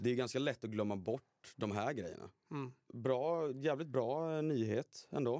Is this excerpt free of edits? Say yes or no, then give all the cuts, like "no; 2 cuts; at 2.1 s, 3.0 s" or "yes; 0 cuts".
no; 1 cut; at 2.9 s